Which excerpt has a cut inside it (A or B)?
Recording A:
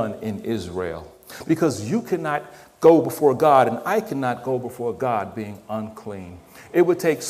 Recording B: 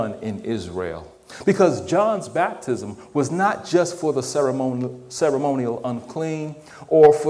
A